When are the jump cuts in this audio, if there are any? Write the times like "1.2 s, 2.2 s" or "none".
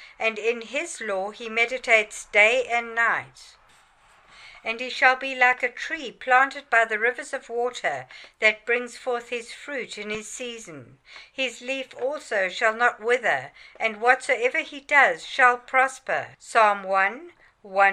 16.3 s